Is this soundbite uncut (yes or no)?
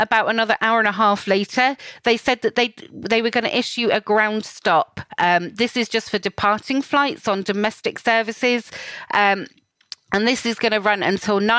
yes